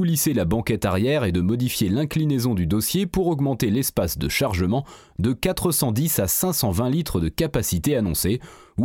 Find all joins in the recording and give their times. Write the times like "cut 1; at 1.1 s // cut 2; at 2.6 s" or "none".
none